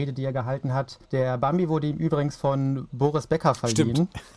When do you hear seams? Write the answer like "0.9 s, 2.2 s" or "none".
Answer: 1.0 s